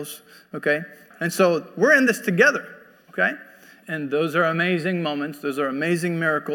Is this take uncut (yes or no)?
no